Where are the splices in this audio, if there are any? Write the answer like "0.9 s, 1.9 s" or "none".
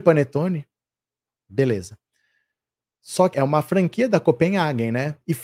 1.4 s, 3.3 s